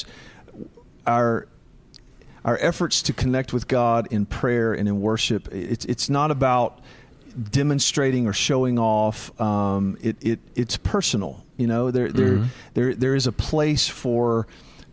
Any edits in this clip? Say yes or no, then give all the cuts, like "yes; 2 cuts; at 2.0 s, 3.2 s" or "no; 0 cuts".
no; 0 cuts